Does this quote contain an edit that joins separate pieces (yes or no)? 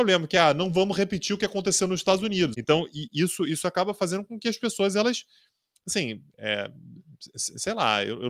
yes